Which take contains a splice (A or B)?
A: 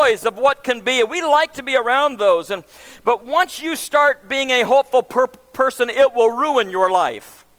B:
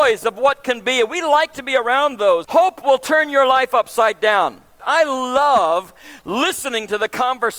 B